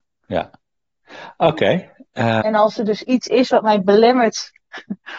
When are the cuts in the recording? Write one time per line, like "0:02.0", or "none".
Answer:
0:02.4